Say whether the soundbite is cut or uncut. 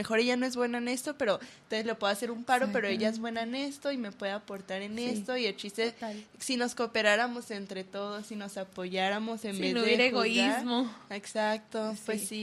uncut